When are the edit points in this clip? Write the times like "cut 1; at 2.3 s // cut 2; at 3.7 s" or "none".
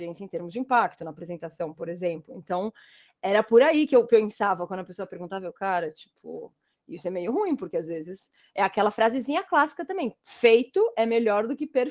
none